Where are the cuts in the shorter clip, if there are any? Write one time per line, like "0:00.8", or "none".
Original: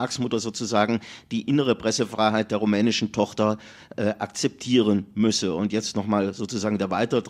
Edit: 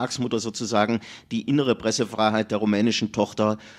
none